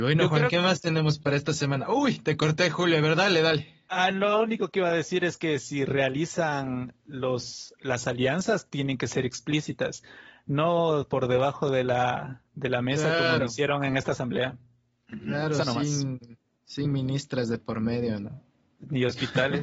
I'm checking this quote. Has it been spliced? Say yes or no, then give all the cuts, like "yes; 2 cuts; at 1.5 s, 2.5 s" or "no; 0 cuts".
no; 0 cuts